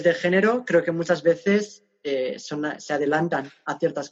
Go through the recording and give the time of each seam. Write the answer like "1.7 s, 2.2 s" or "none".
none